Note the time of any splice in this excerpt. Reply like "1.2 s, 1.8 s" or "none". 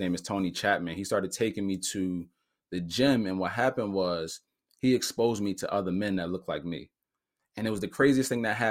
none